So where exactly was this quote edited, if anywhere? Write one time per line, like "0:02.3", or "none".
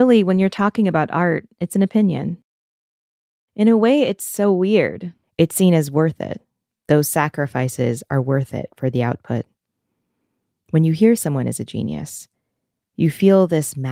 0:05.2